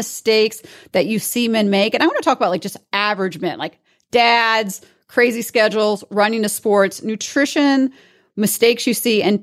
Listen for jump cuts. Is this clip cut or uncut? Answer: uncut